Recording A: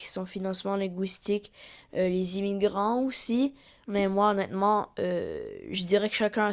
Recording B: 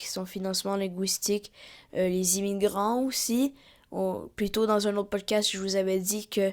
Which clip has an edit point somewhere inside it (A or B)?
A